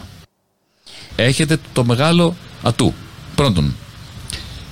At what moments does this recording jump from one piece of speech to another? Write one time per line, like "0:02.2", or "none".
0:01.1